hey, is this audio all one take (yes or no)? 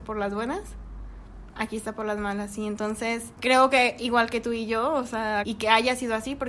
no